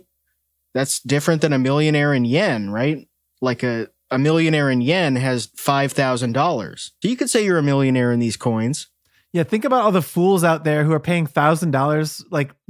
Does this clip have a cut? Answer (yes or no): yes